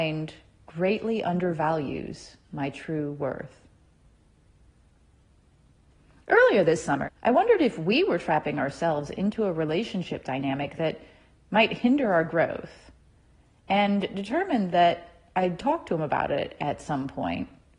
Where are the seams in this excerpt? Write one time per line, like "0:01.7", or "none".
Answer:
0:07.0